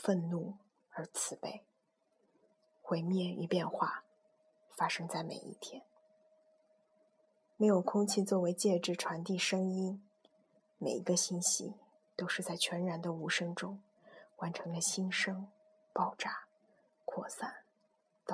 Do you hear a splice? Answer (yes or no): no